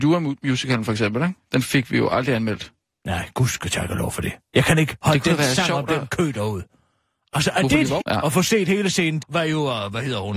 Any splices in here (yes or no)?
yes